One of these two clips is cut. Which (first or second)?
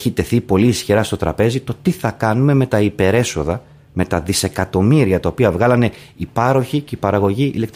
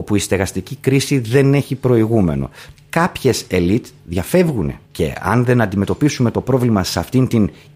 second